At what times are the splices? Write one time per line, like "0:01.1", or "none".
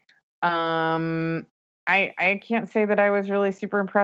none